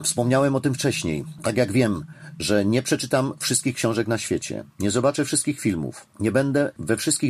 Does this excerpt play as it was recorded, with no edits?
yes; 0 cuts

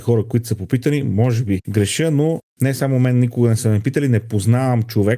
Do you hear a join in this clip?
no; 0 cuts

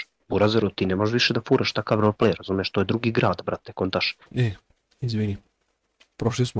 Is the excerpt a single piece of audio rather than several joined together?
no; 1 cut; at 4.2 s

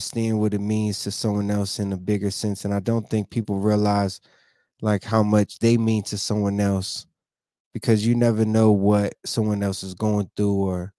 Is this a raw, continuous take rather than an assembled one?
yes; 0 cuts

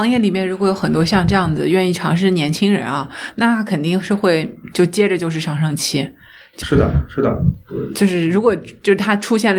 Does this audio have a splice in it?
yes; 1 cut; at 6.6 s

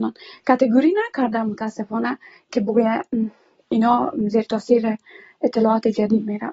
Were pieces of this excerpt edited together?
no; 0 cuts

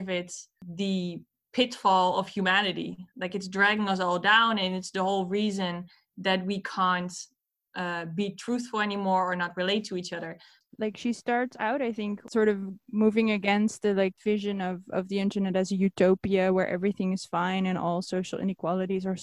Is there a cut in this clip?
no; 0 cuts

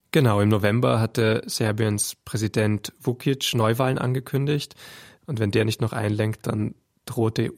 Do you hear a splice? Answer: yes; 1 cut; at 5.2 s

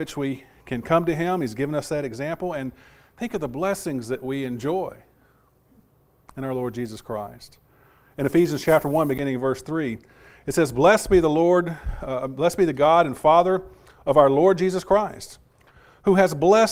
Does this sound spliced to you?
no; 0 cuts

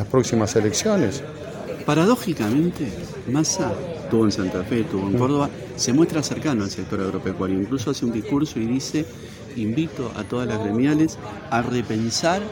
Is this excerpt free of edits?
yes; 0 cuts

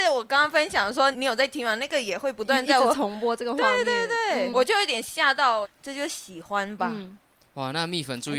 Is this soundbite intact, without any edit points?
no; 3 cuts; at 1.1 s, 4.5 s, 5.6 s

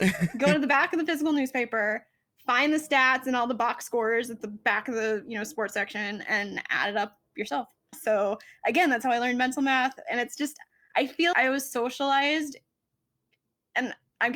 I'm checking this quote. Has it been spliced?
yes; 2 cuts; at 7.9 s, 11.3 s

